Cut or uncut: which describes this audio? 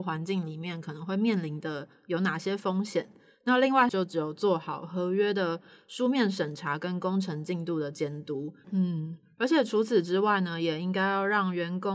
cut